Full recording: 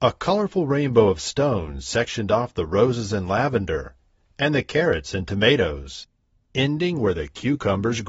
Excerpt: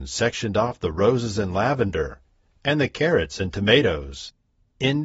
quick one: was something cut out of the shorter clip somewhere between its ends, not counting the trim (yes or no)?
no